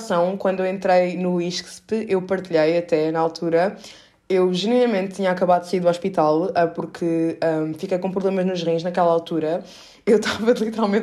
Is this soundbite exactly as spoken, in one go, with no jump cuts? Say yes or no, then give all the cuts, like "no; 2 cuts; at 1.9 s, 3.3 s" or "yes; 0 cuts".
yes; 0 cuts